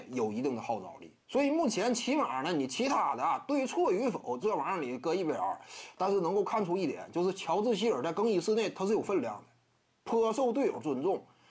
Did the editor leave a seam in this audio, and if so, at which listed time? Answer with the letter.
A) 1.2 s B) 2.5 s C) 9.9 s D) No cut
A